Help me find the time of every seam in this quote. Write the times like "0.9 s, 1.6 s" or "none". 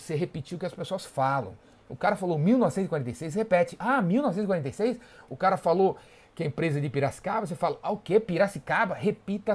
none